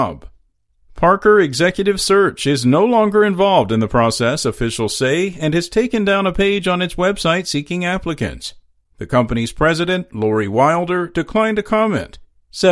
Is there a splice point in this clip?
no; 0 cuts

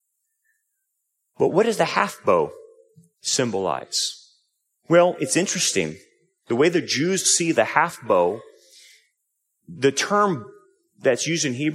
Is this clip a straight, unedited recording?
yes; 0 cuts

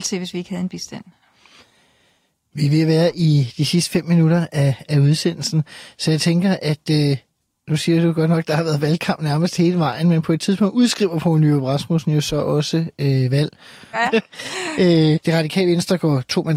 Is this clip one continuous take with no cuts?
no; 2 cuts; at 13.9 s, 15.2 s

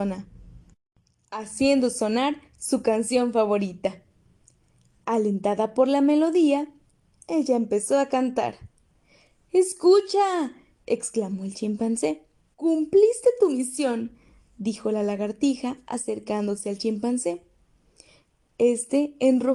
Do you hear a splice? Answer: yes; 1 cut; at 12.5 s

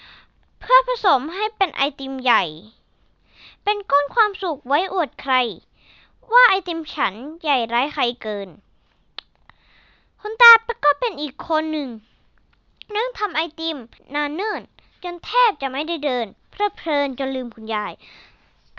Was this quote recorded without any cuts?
yes; 0 cuts

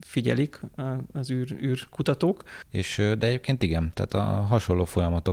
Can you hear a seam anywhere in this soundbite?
yes; 1 cut; at 2.7 s

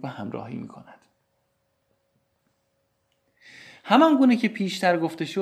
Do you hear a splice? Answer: no; 0 cuts

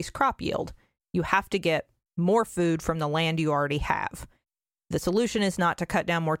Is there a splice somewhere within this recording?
no; 0 cuts

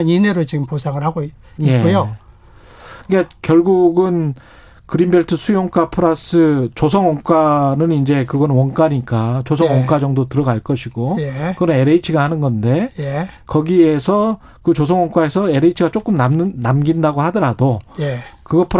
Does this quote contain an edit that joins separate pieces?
no; 0 cuts

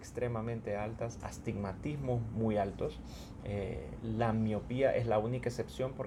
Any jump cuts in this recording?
no; 0 cuts

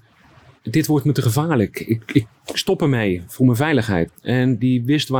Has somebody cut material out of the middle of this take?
yes; 1 cut; at 4.1 s

